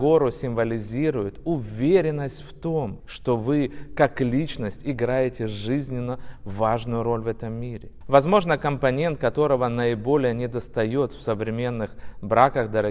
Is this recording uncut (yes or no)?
no